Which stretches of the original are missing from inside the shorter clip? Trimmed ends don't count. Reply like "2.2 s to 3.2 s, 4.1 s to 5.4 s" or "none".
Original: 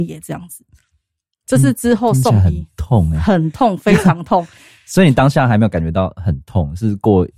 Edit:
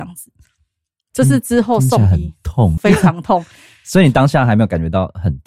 3.1 s to 3.8 s